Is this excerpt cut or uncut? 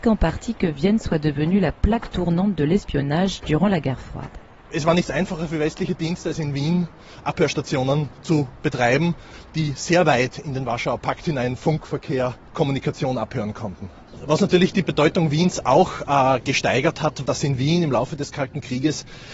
cut